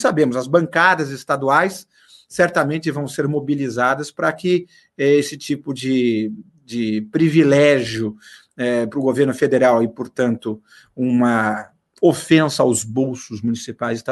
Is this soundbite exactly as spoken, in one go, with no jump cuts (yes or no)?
yes